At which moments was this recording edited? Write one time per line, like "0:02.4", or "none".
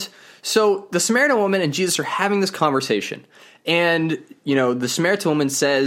none